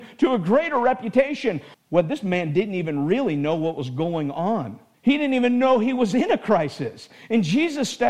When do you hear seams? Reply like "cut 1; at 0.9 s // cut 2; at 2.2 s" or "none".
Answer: cut 1; at 1.7 s // cut 2; at 4.9 s